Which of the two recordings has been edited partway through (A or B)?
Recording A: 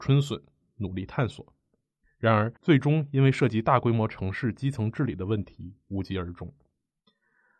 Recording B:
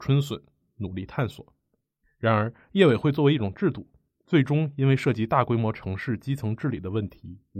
A